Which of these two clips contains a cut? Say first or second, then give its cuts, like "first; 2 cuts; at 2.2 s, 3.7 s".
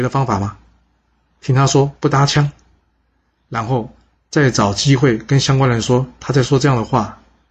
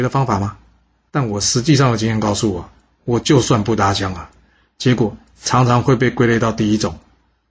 second; 1 cut; at 1.1 s